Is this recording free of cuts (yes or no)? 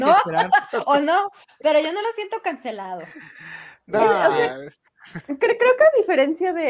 yes